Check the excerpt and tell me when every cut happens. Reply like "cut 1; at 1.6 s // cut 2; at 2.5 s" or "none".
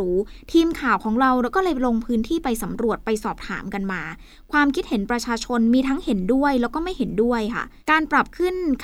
cut 1; at 7.8 s